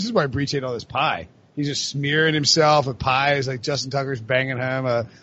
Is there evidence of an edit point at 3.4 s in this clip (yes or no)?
no